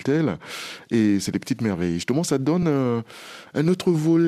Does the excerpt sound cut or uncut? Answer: uncut